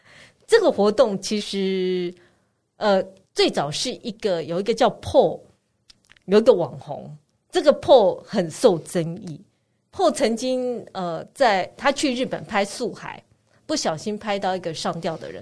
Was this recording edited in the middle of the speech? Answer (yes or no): no